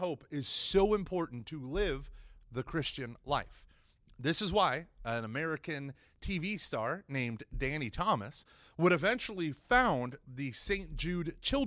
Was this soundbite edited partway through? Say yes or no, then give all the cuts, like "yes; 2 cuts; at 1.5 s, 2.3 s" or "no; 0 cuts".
no; 0 cuts